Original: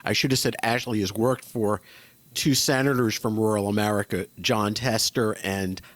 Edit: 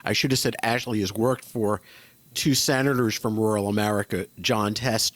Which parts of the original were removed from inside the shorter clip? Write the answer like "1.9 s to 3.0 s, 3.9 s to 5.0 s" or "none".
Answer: none

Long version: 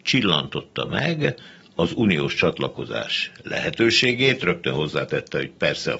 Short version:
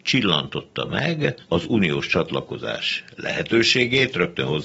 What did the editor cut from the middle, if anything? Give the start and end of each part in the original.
1.4 s to 1.7 s

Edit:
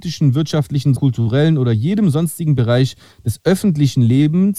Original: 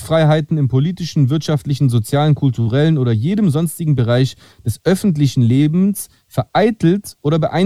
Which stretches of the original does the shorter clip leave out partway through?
1.9 s to 2.4 s

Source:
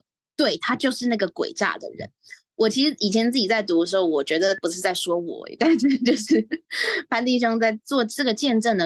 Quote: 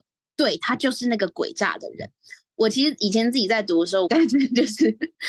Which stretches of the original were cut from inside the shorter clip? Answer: 4.1 s to 5.6 s

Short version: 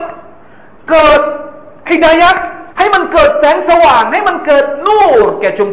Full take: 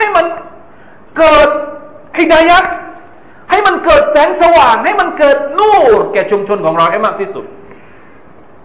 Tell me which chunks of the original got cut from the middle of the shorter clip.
3.0 s to 3.4 s

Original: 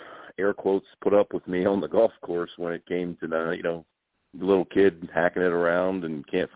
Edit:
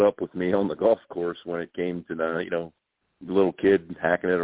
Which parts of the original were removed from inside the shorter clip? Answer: none

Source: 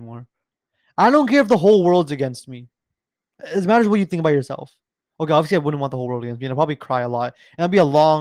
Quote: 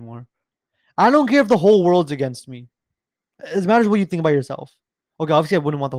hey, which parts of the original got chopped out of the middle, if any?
none

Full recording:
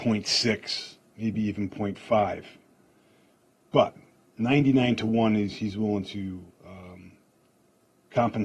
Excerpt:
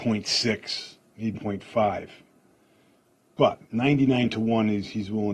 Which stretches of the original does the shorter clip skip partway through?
1.3 s to 1.7 s, 4.0 s to 4.3 s

